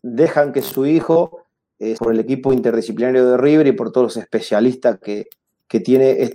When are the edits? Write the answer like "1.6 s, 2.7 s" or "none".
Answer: 2.0 s